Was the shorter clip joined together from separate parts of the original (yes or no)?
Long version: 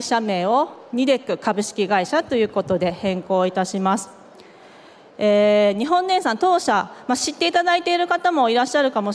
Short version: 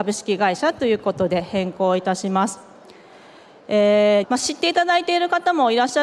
yes